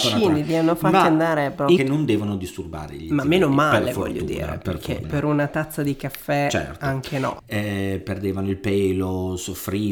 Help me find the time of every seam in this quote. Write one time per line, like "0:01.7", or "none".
0:01.8
0:05.0
0:07.4